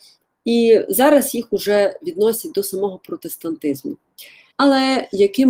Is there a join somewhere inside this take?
yes; 1 cut; at 4.5 s

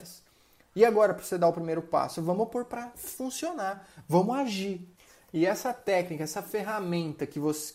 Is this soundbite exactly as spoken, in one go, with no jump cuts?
yes; 0 cuts

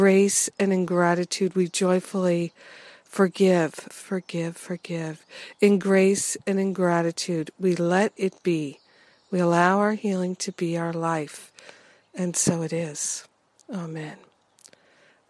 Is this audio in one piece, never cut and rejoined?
no; 1 cut; at 3.9 s

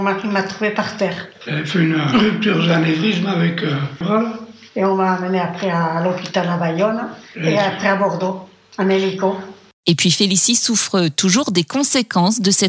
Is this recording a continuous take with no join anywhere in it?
no; 1 cut; at 4.0 s

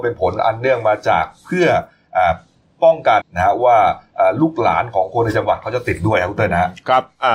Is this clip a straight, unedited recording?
no; 1 cut; at 3.2 s

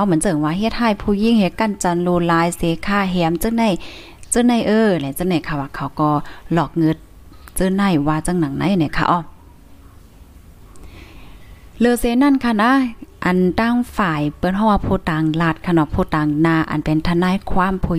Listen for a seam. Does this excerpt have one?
no; 0 cuts

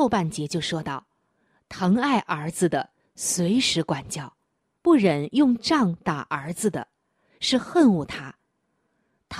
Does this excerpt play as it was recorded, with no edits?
no; 1 cut; at 4.8 s

